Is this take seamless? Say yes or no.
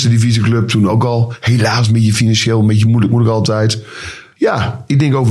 no